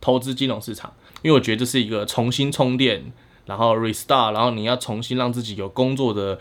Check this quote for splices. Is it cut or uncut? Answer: cut